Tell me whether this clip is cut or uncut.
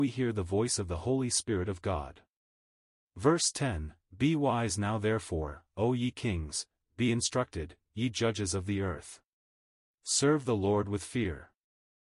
cut